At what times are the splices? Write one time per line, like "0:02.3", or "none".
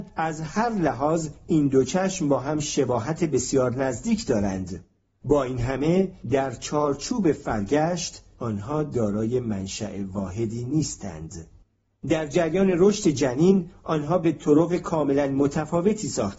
none